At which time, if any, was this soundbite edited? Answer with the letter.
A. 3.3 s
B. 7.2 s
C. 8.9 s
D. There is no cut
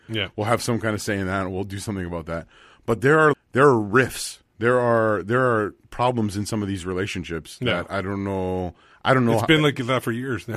A